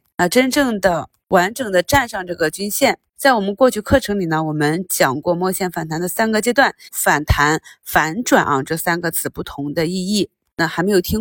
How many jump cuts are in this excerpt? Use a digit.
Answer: 2